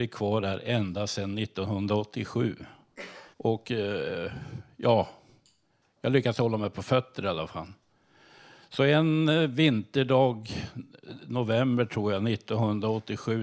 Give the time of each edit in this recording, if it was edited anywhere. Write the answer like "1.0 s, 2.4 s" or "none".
3.3 s

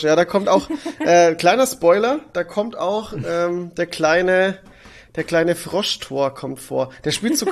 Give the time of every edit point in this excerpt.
none

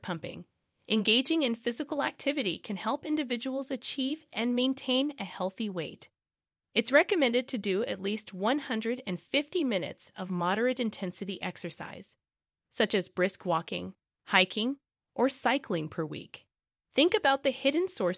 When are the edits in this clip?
16.8 s

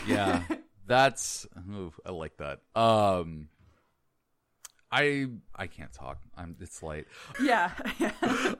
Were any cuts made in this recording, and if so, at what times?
2.7 s, 5.5 s, 7.3 s

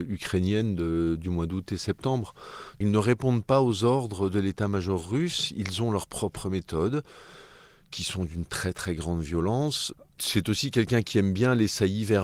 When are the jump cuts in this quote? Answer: none

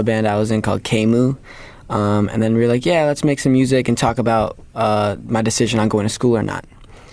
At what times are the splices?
none

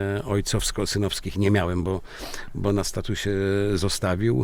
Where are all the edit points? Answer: none

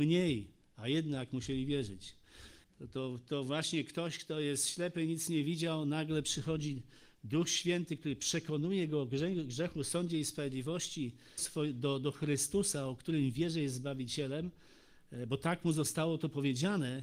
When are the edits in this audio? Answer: 2.6 s, 11.4 s

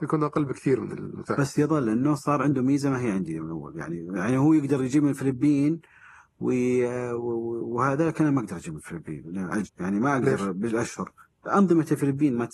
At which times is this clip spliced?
9.7 s

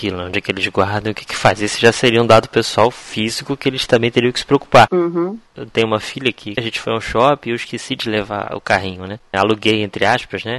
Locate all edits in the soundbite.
5.5 s, 6.6 s, 9.3 s

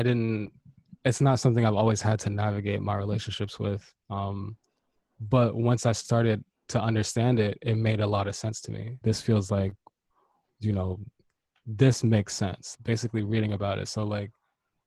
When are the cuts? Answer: 9.0 s, 12.7 s

